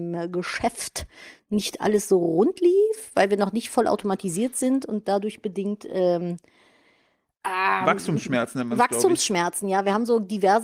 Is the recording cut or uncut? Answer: uncut